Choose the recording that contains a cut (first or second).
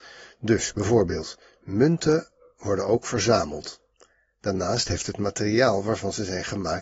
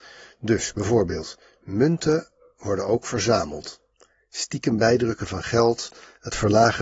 second